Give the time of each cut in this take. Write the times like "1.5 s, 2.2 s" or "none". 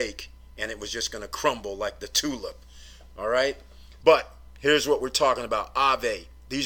4.0 s